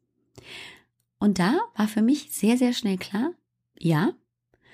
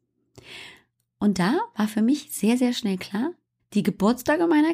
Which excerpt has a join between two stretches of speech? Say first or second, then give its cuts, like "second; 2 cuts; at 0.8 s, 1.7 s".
second; 1 cut; at 3.6 s